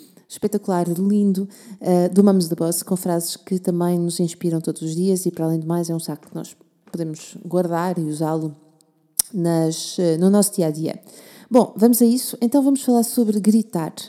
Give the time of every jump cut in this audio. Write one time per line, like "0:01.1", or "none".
none